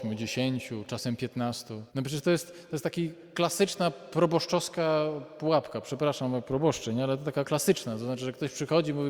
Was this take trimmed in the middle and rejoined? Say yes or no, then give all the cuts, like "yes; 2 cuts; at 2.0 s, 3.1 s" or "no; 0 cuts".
yes; 1 cut; at 1.9 s